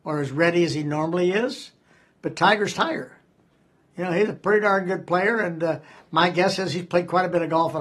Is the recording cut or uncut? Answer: uncut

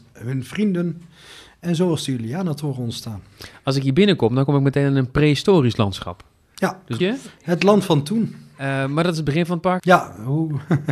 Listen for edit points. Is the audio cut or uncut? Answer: cut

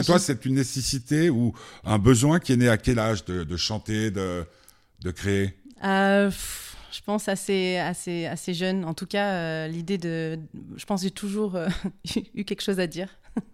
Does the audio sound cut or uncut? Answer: uncut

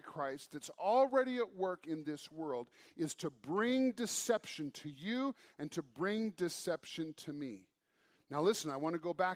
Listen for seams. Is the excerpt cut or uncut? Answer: uncut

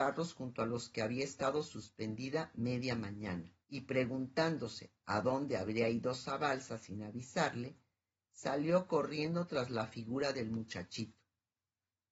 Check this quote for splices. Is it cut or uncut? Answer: cut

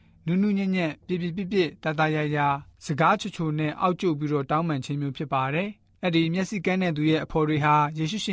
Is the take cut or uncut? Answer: uncut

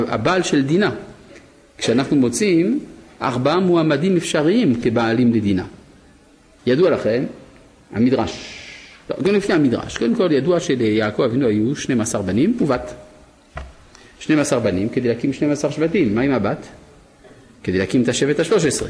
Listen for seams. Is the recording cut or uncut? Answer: cut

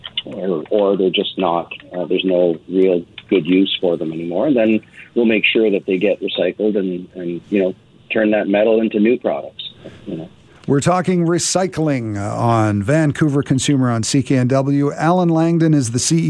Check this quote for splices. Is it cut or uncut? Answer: uncut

